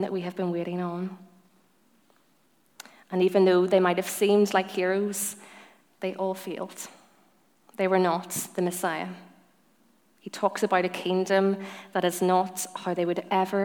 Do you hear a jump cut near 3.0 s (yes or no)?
no